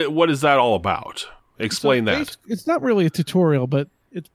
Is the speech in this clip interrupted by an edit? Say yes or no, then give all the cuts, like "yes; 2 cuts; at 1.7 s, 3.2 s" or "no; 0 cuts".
no; 0 cuts